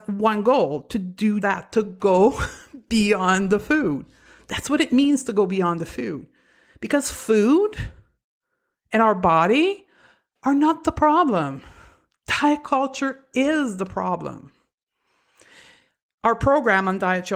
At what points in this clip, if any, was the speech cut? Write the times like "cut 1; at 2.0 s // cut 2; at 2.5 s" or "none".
cut 1; at 1.4 s